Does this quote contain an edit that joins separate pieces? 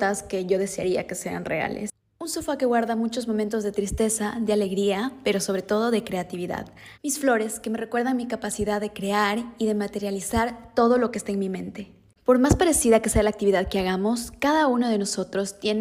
yes; 2 cuts; at 7.0 s, 12.2 s

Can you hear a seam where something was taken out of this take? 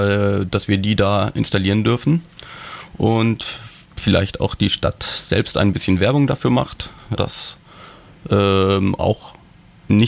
yes; 2 cuts; at 3.9 s, 7.2 s

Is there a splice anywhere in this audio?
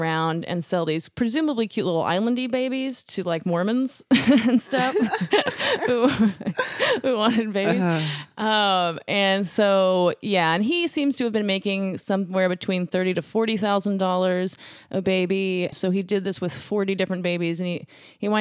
yes; 1 cut; at 15.7 s

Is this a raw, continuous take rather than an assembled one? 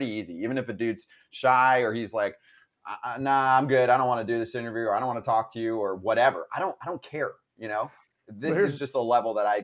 yes; 0 cuts

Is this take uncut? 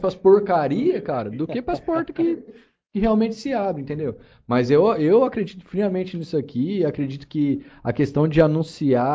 yes; 0 cuts

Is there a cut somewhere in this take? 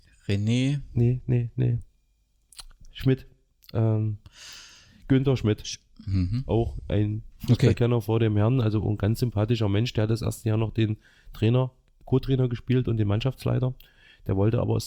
no; 0 cuts

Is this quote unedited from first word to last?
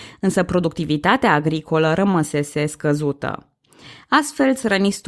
yes; 0 cuts

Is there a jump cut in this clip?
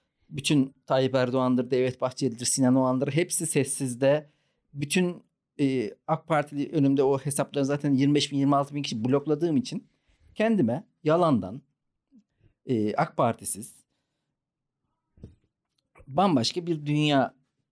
no; 0 cuts

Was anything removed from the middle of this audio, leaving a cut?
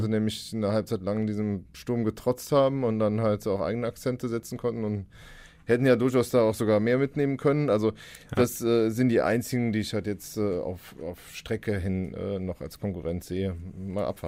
yes; 1 cut; at 10.9 s

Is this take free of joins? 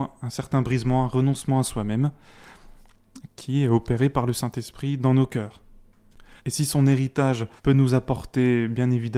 no; 2 cuts; at 6.4 s, 7.6 s

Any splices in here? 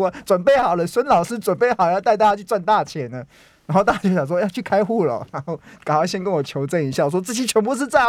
no; 0 cuts

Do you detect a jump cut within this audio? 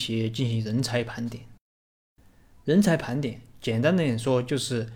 no; 0 cuts

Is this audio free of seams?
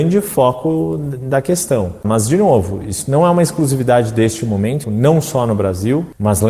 no; 2 cuts; at 2.0 s, 4.8 s

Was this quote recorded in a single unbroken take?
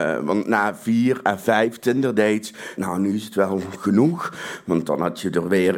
no; 1 cut; at 2.8 s

